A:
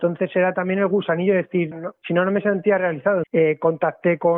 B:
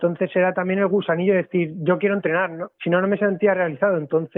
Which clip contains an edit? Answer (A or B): A